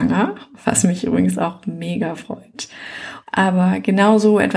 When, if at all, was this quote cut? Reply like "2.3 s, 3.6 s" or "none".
3.2 s